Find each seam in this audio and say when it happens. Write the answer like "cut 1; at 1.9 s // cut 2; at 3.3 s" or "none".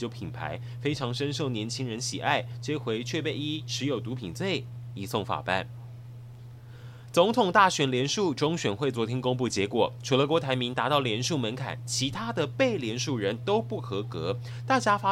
none